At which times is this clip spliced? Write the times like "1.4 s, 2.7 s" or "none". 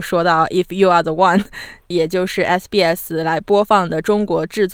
1.9 s